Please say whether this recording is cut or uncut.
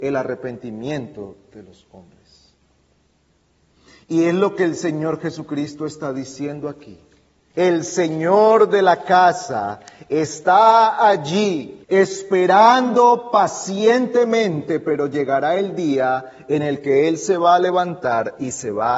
cut